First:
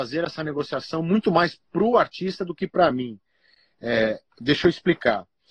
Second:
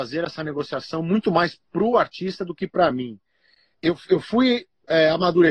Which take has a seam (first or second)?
second